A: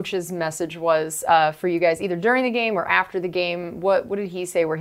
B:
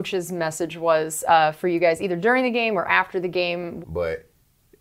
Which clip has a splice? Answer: B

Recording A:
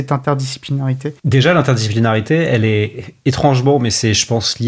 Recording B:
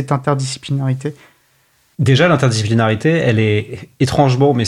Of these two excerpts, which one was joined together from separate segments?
A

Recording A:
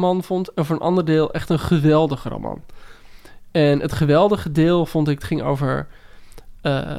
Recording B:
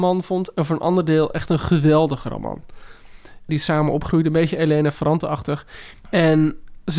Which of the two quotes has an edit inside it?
B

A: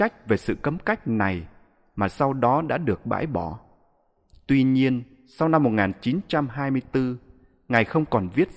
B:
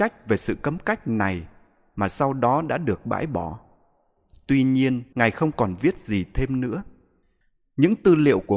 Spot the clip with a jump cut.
B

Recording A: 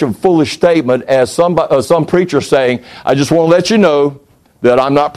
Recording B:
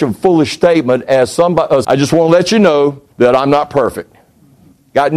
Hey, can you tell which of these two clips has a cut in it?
B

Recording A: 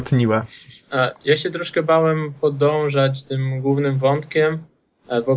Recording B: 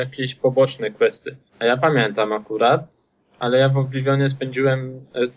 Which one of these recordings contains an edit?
B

